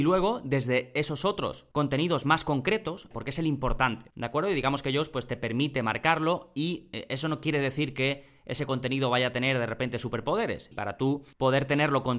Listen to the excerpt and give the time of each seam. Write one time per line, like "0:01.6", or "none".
0:03.1
0:10.7